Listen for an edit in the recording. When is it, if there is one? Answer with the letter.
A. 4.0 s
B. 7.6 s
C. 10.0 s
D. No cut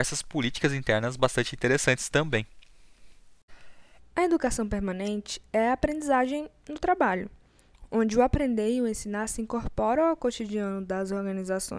A